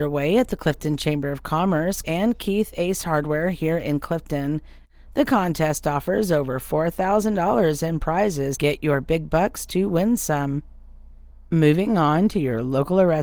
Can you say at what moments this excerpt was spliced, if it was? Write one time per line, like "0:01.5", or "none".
0:02.0
0:08.5